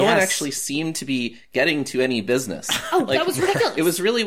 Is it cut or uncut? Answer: uncut